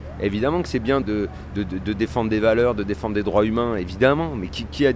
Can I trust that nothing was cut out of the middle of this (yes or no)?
no